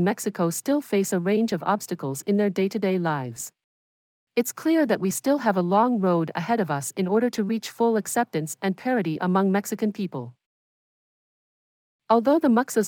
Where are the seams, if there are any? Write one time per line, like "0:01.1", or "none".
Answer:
none